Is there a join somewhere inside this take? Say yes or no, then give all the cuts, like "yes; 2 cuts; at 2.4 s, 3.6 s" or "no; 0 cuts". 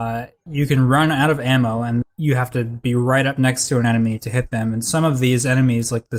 yes; 1 cut; at 2.0 s